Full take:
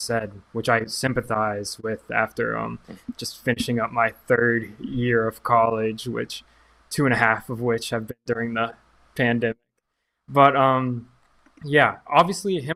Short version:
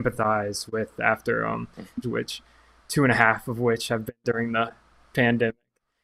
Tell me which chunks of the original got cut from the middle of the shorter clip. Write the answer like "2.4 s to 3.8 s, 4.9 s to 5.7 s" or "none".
3.1 s to 6.0 s